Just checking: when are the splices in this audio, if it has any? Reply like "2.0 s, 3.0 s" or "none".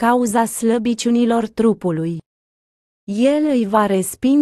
2.9 s